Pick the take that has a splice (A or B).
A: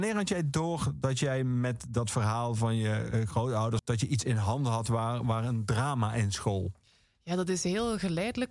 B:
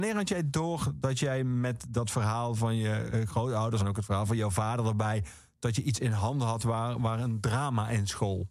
A